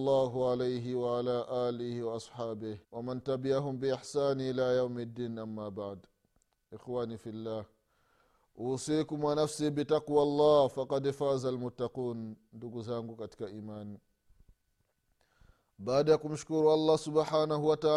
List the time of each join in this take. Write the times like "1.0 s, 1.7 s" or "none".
2.8 s

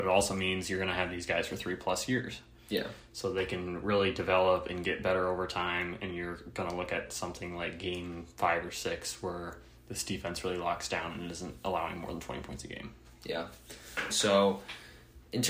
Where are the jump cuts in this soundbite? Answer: 14.1 s

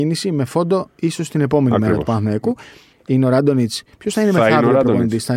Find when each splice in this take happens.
2.9 s

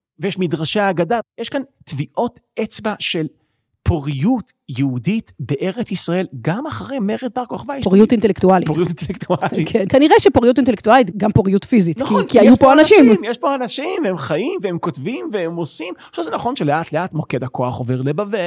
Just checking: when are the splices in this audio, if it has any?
none

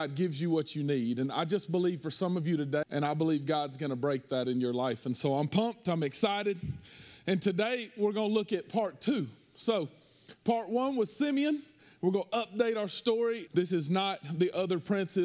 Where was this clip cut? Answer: 2.8 s, 13.5 s

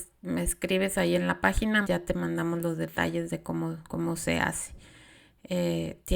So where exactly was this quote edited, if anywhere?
1.8 s

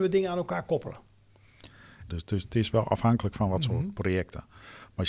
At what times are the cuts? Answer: 2.1 s

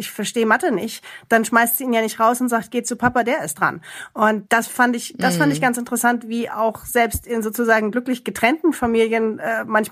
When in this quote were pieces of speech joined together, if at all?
none

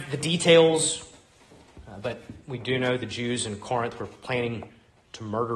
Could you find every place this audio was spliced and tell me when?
none

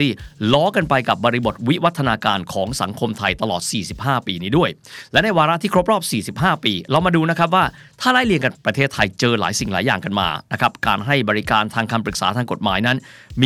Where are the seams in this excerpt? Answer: 8.6 s

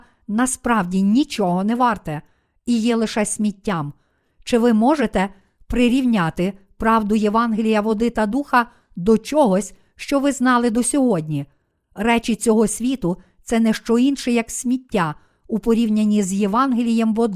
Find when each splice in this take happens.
none

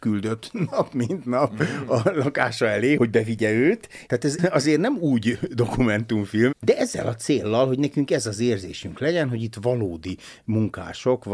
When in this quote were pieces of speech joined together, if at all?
3.0 s, 4.1 s, 6.5 s

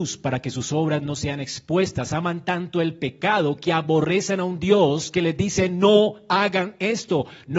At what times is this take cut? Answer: none

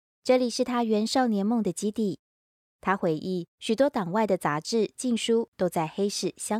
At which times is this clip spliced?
3.5 s

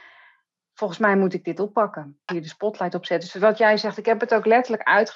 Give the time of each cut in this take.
2.3 s

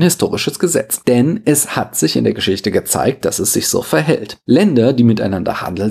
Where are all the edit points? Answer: none

